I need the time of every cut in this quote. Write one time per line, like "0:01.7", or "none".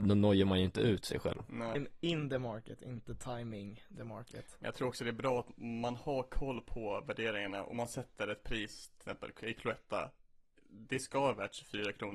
0:01.7